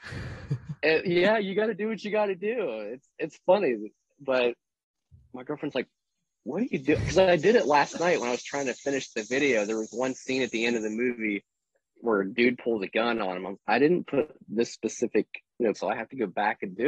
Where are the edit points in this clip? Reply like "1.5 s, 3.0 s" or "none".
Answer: 13.6 s, 15.7 s